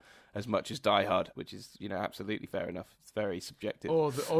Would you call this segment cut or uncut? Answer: cut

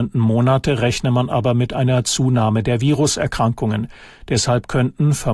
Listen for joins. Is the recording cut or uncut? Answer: uncut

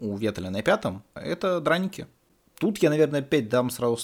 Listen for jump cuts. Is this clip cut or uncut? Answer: cut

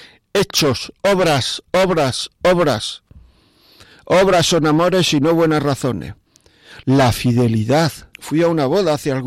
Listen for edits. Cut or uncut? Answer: cut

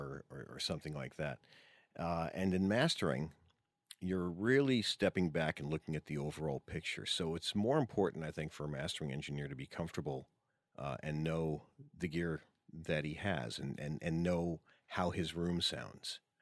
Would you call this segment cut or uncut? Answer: uncut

